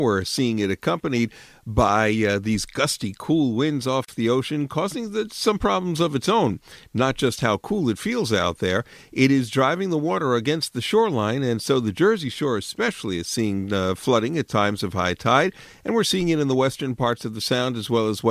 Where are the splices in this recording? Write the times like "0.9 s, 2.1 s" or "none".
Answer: none